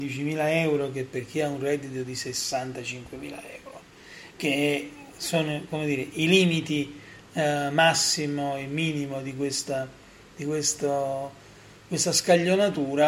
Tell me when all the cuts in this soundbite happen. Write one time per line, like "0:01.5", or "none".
none